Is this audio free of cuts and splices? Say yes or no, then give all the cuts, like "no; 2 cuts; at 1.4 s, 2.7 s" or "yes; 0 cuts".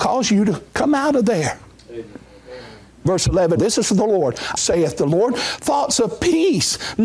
no; 2 cuts; at 3.6 s, 4.6 s